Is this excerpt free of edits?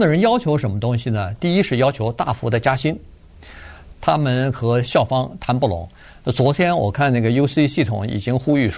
no; 1 cut; at 3.9 s

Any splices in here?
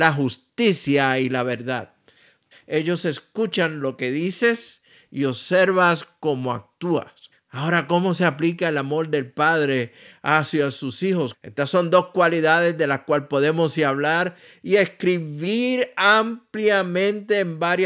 yes; 3 cuts; at 2.5 s, 7.3 s, 11.3 s

